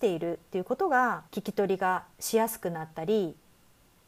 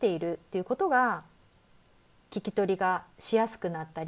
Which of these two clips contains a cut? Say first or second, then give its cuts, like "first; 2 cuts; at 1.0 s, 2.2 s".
first; 1 cut; at 1.3 s